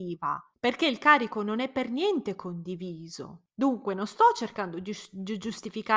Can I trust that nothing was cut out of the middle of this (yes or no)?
yes